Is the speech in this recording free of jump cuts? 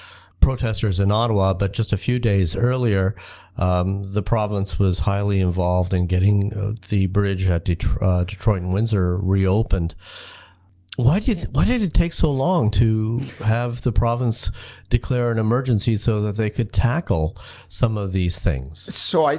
yes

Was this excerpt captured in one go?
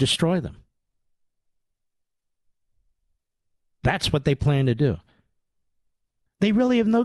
yes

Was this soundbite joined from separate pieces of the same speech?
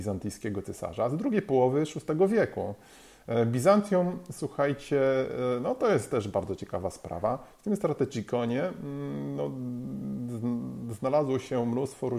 no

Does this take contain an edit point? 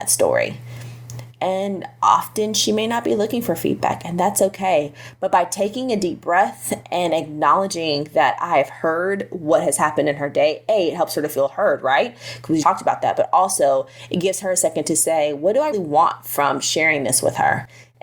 yes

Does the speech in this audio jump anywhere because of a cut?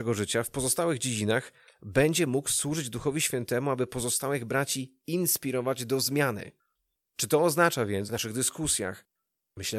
yes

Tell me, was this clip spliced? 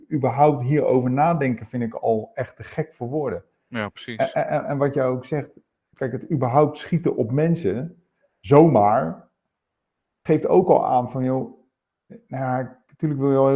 no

